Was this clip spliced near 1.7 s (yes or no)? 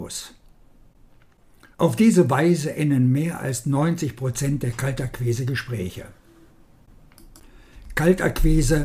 no